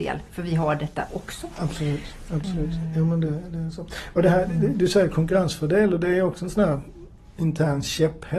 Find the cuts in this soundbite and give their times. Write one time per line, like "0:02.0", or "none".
0:02.3